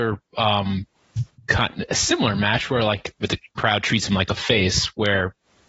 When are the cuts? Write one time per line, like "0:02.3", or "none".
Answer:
0:03.2